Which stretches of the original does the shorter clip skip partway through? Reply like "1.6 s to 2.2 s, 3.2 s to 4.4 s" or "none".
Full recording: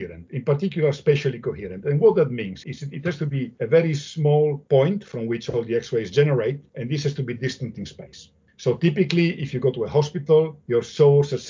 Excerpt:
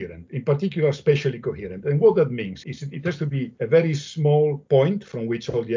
none